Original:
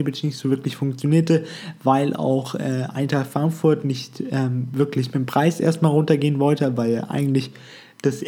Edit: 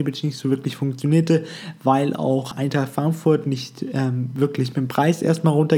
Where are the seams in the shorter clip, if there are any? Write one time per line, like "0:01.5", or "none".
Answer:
0:02.5